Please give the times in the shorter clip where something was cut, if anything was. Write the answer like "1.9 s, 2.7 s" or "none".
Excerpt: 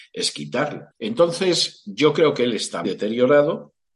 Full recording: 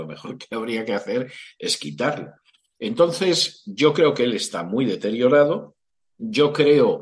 0.9 s, 2.8 s